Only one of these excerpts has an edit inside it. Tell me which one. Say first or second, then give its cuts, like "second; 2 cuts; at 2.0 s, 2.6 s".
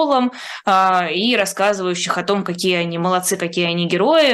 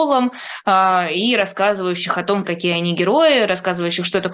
second; 1 cut; at 2.4 s